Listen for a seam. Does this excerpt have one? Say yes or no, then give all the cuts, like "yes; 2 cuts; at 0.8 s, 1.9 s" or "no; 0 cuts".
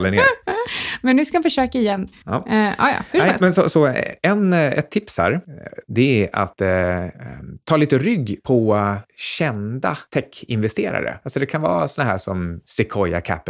no; 0 cuts